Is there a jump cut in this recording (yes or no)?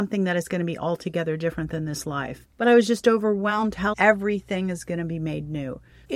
yes